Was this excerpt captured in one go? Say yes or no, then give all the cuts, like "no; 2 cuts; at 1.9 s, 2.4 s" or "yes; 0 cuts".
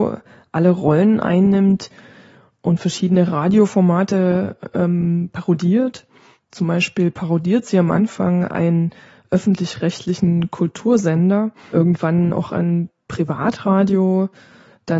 yes; 0 cuts